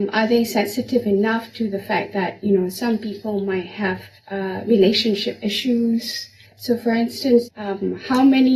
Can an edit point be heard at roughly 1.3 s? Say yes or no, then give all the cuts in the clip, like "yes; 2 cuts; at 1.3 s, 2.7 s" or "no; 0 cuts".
no; 3 cuts; at 4.2 s, 6.4 s, 7.4 s